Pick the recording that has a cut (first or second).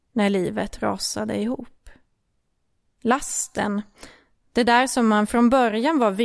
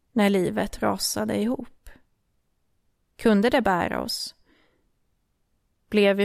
first